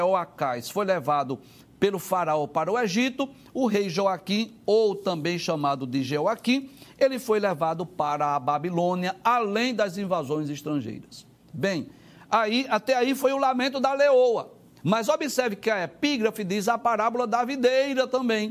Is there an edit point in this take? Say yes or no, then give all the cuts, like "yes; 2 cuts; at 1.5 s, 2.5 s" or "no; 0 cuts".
no; 0 cuts